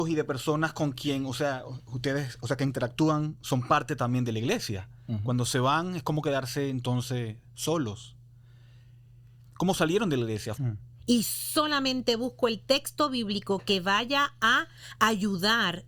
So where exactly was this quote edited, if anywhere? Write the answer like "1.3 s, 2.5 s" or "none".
10.6 s